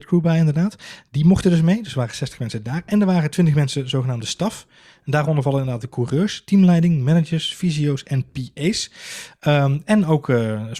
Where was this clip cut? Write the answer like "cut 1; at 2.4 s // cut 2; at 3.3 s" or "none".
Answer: none